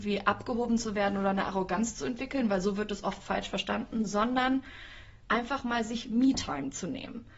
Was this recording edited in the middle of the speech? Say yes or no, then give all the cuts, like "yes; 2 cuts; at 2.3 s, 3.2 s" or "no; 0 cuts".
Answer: no; 0 cuts